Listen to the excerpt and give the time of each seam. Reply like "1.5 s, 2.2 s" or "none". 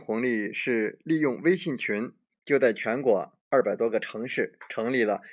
2.3 s